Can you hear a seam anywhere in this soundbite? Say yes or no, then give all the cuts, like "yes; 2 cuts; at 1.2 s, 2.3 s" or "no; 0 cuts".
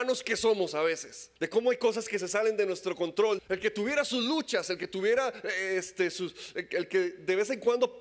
yes; 2 cuts; at 1.4 s, 3.4 s